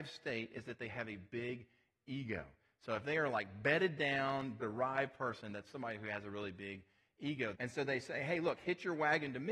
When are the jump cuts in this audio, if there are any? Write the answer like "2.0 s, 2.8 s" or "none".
4.6 s, 7.5 s